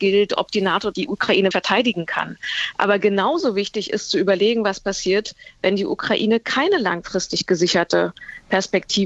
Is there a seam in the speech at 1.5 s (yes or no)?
yes